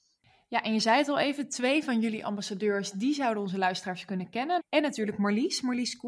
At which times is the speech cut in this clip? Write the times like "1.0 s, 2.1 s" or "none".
4.6 s